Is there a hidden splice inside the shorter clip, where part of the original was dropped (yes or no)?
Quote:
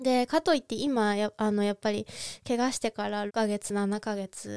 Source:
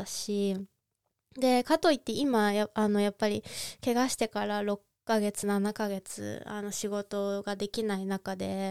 yes